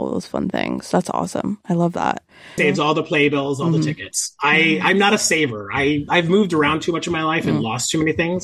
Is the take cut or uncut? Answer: cut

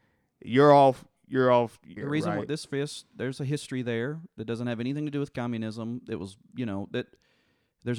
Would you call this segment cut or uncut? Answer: cut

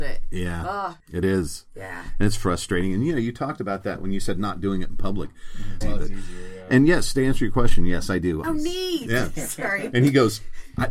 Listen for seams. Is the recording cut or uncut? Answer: cut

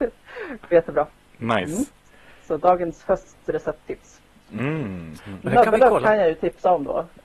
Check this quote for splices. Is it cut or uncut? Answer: cut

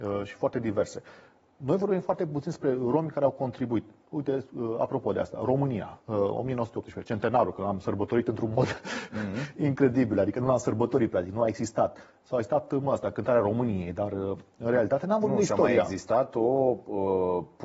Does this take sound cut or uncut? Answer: uncut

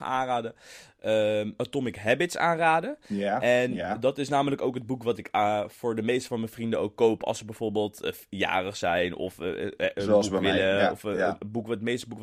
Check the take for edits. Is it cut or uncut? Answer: cut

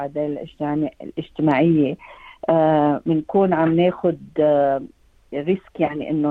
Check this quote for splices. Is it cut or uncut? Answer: uncut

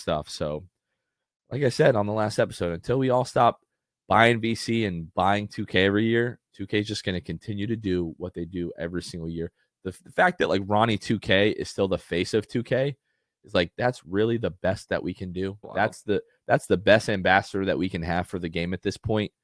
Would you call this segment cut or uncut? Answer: uncut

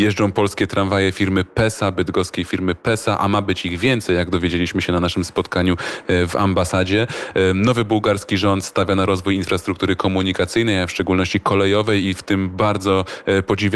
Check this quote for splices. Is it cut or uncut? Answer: uncut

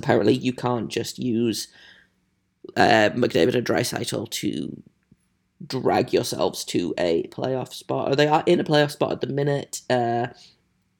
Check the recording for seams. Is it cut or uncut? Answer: uncut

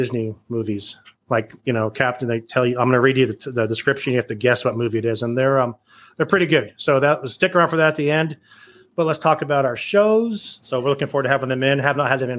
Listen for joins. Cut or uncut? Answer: cut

